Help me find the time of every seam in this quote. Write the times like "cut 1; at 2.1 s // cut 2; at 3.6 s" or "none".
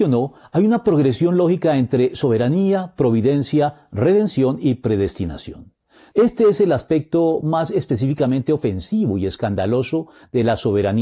cut 1; at 6.1 s